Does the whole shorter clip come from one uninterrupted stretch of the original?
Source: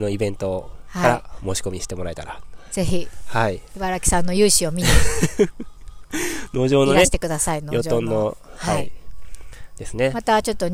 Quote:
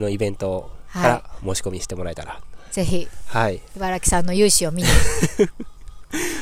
yes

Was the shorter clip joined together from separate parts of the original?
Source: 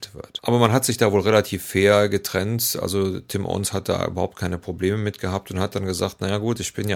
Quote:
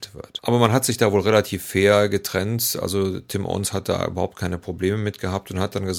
no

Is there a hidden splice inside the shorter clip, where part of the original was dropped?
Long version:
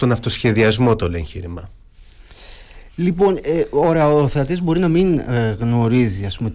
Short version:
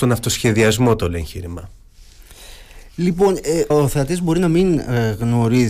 yes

